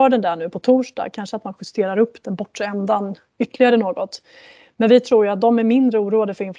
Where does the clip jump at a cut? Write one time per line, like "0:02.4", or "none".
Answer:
0:02.2